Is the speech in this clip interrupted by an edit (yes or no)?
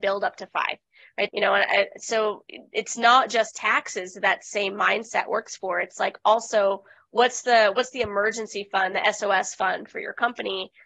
yes